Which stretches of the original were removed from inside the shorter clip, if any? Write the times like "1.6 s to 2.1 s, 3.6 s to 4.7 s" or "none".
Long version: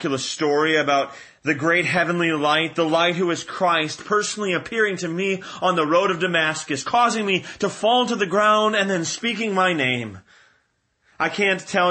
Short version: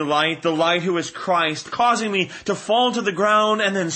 4.0 s to 6.8 s